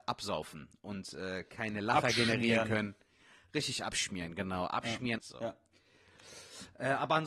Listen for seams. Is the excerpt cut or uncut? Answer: cut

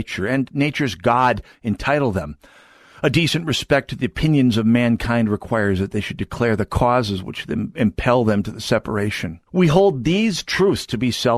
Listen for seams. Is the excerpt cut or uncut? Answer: cut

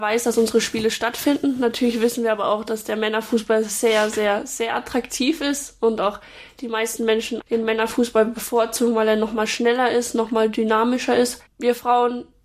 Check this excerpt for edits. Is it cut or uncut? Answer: cut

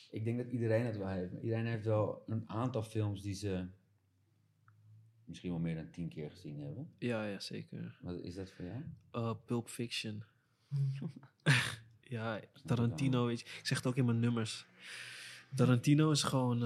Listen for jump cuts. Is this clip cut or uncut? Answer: uncut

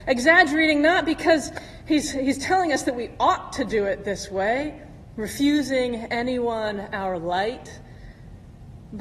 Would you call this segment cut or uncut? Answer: uncut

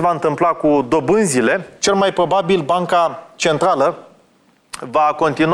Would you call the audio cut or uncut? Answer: uncut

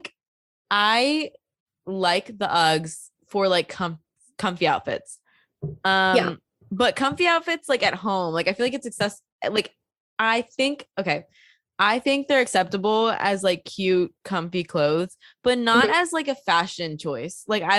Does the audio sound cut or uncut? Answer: cut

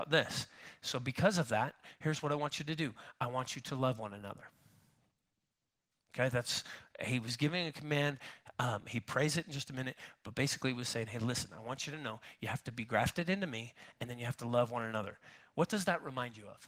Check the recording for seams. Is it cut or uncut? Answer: uncut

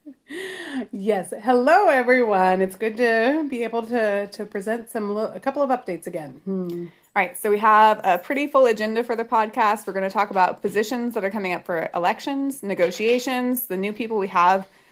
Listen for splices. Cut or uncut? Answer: uncut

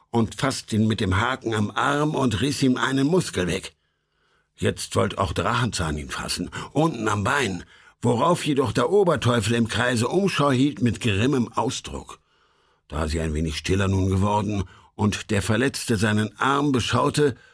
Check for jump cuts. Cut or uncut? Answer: uncut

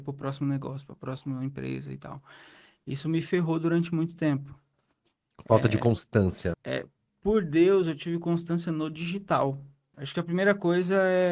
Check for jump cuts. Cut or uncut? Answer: cut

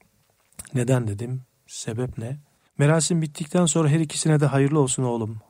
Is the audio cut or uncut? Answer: cut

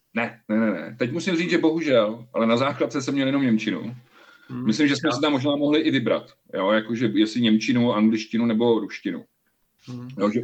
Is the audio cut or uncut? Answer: uncut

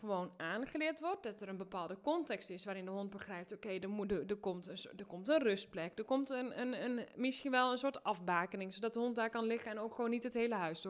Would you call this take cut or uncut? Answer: uncut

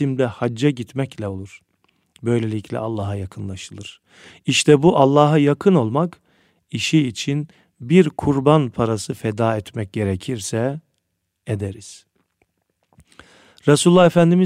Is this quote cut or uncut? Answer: uncut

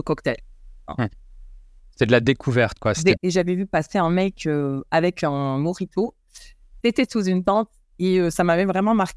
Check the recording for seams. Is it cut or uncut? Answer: cut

